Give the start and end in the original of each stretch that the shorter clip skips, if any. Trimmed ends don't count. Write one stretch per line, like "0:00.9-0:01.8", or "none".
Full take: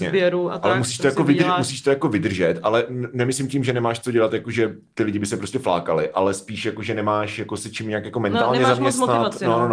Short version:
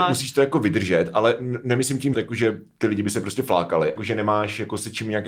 0:03.6-0:04.3
0:06.1-0:06.8